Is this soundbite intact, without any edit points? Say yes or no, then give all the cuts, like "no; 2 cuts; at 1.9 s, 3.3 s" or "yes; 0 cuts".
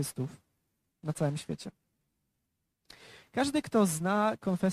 no; 1 cut; at 3.2 s